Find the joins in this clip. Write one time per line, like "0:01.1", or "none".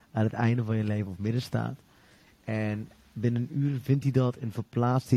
none

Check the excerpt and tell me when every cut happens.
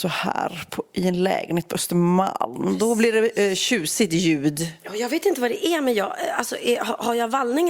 none

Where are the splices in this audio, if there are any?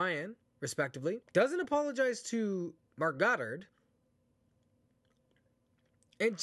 0:01.2

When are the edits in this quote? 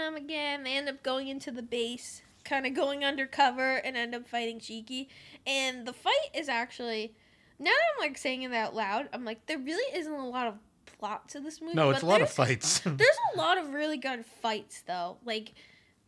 none

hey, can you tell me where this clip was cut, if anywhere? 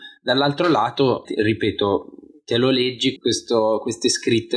0:01.2
0:03.2

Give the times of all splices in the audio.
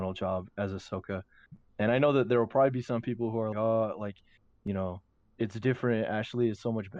0:03.5

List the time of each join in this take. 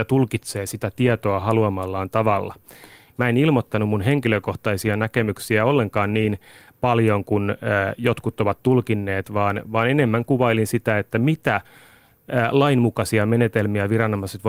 0:03.1

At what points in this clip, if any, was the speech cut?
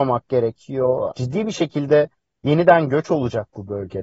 0:01.1

